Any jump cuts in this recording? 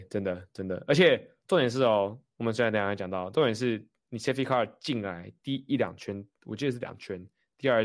no; 0 cuts

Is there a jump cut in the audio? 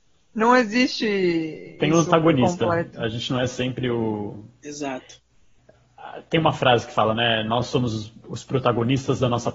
no; 0 cuts

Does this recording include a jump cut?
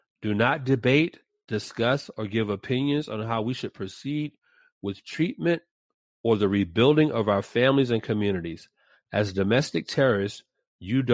no; 0 cuts

